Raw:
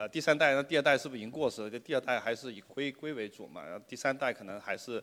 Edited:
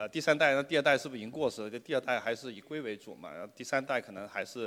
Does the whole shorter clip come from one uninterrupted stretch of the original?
no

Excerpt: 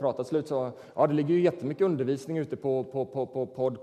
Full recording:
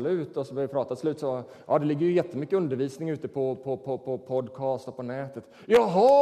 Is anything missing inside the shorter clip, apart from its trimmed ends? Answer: no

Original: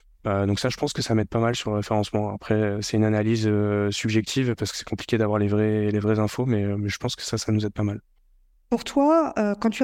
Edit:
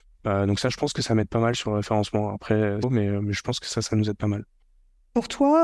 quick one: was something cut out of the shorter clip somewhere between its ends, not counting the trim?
yes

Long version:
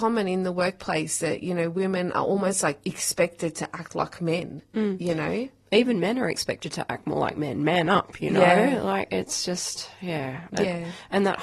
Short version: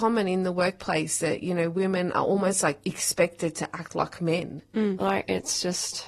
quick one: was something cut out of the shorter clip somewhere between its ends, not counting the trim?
yes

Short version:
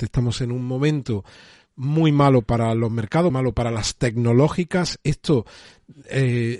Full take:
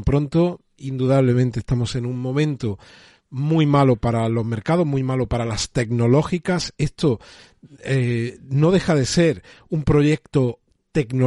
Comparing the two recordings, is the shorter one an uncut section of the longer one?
no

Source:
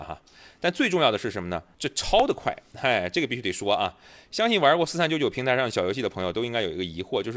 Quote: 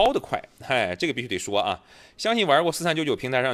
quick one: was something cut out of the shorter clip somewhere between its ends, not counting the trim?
no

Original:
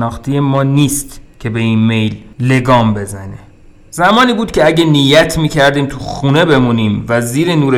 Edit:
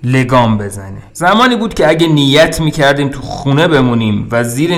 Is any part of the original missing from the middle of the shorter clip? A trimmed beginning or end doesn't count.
yes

